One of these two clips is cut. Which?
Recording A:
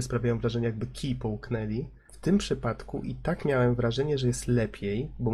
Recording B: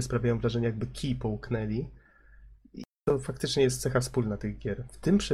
A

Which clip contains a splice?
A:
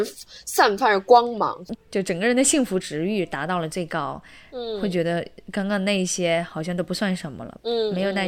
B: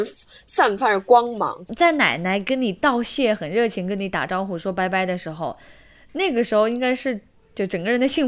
A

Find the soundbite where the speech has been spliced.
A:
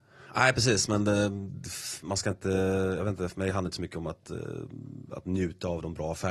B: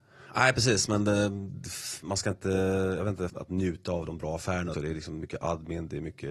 B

